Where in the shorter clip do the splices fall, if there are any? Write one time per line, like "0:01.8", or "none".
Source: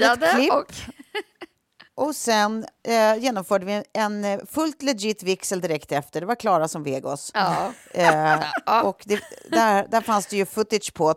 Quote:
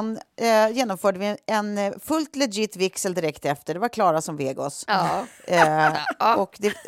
none